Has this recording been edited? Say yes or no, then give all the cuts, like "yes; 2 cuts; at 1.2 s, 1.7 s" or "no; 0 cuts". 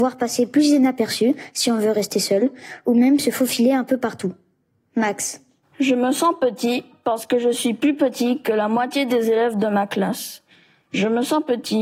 no; 0 cuts